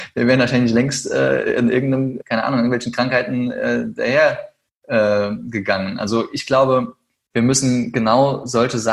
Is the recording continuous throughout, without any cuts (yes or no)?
no